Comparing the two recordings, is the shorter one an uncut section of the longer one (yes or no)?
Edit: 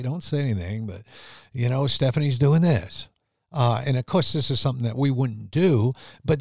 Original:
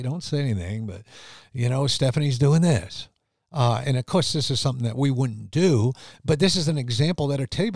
yes